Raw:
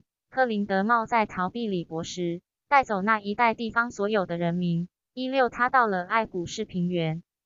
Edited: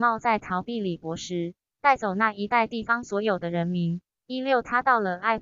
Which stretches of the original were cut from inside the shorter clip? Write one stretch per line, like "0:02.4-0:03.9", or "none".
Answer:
none